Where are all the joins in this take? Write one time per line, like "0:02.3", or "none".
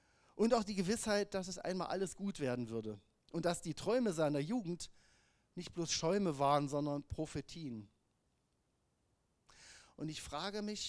none